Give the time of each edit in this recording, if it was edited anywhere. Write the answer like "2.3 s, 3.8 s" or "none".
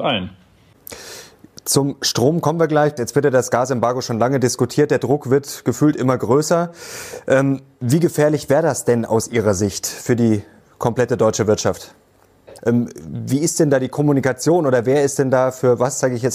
3.0 s, 12.6 s